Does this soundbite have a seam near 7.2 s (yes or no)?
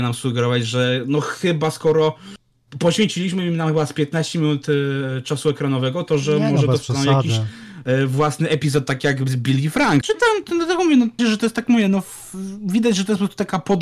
no